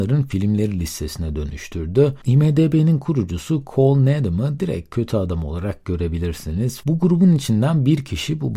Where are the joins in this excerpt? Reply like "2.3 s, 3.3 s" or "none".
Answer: 2.2 s, 6.8 s